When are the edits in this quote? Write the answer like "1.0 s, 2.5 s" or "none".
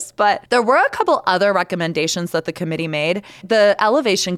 3.4 s